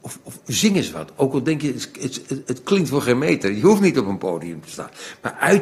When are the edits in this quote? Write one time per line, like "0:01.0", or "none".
0:02.4

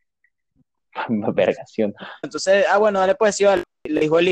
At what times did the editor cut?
0:02.2

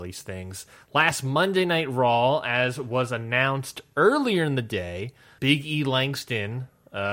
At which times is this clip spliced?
0:05.4

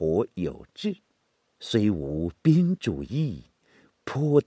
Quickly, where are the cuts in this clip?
0:01.6

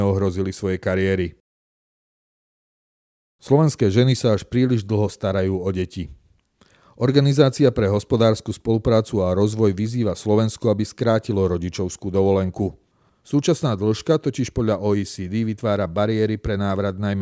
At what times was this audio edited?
none

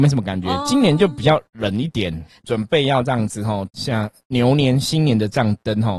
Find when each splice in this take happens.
0:02.4
0:03.7

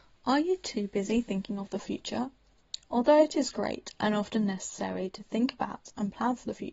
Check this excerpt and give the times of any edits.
none

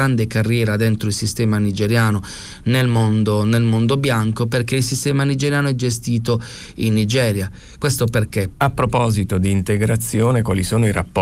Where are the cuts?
0:08.5

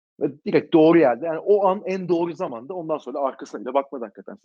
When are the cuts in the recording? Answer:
none

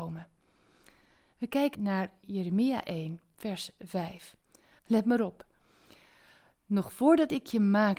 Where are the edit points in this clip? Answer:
0:01.7
0:04.8

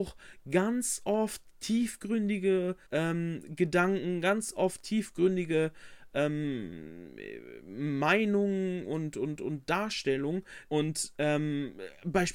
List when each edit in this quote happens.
0:02.9
0:10.7

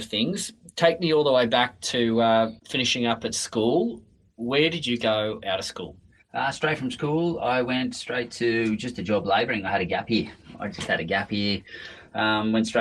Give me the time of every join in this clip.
0:02.6

